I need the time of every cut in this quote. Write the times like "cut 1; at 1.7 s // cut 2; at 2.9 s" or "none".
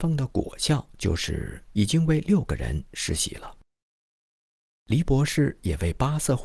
cut 1; at 1.7 s